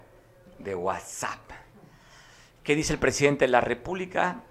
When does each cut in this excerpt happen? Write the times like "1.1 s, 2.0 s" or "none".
none

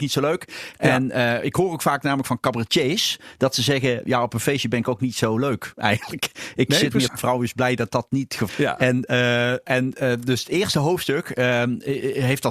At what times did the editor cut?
7.1 s, 8.5 s

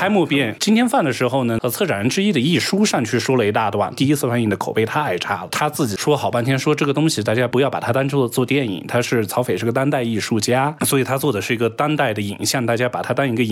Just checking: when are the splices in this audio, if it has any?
none

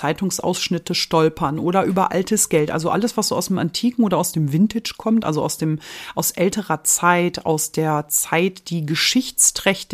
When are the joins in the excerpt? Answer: none

